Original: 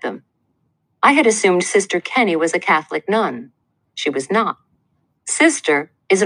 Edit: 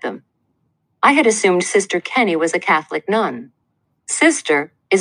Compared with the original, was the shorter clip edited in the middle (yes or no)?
yes